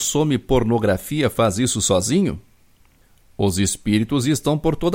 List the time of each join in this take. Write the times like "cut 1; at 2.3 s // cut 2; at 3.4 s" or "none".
none